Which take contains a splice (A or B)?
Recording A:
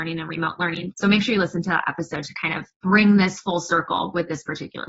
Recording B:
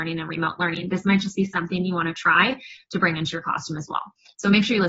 A